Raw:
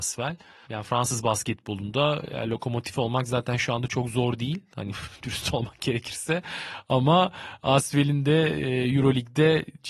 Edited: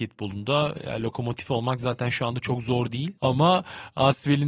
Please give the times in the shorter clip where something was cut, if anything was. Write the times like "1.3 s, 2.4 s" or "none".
3.2 s